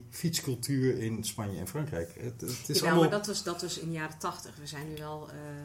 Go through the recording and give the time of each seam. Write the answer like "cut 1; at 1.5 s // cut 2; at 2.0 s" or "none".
none